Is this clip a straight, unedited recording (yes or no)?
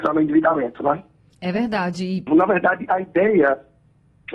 no